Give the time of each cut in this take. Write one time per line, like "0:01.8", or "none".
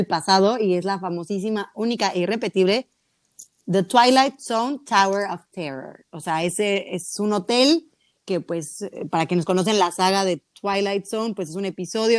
none